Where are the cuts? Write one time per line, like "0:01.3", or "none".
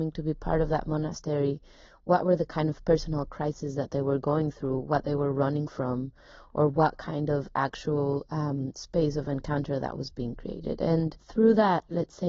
none